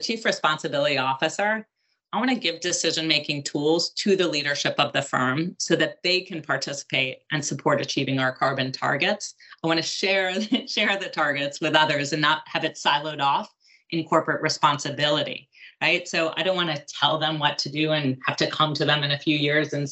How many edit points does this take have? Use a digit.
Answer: 0